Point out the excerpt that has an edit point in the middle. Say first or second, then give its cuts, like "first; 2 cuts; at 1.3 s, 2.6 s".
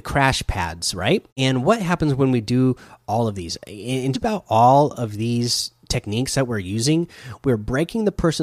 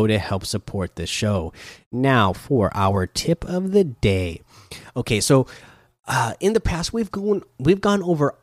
first; 2 cuts; at 1.3 s, 4.1 s